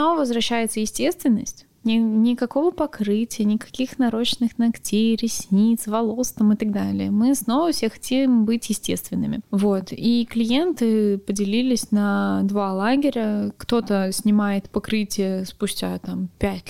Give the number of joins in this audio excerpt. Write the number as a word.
zero